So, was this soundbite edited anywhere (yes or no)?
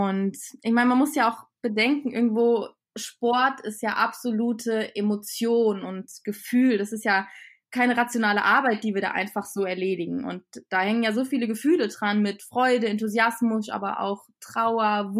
no